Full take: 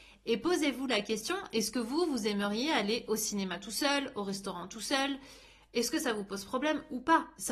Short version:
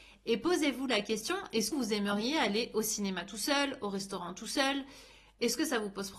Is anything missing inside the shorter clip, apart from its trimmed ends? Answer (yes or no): yes